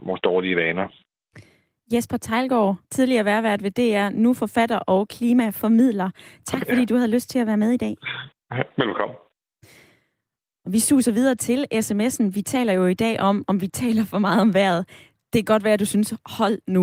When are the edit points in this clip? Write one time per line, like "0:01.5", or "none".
0:02.8